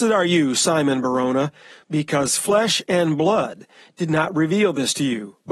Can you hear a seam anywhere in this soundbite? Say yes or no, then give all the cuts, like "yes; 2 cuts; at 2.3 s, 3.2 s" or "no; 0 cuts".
no; 0 cuts